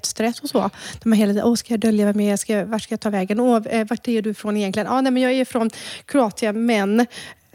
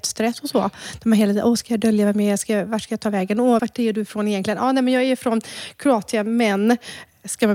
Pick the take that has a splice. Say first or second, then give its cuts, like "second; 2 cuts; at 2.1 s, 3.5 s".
second; 1 cut; at 3.6 s